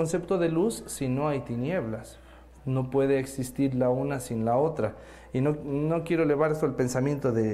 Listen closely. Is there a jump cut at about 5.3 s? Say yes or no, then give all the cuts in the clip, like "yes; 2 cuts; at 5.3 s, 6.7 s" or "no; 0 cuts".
no; 1 cut; at 2.5 s